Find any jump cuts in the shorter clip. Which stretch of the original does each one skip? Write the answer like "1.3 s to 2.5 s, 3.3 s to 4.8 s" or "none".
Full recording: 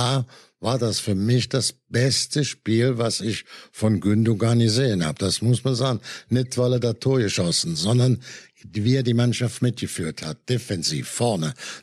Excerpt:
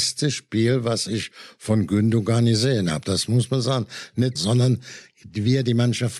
6.5 s to 7.7 s